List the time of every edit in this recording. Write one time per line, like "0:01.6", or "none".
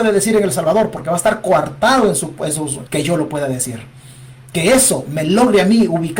0:02.9